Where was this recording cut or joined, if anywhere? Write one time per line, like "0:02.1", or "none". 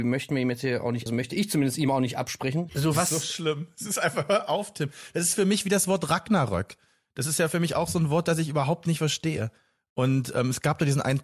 0:01.1
0:02.7